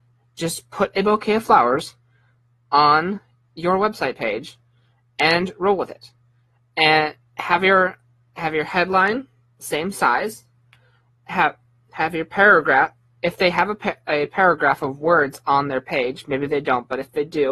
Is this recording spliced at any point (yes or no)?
no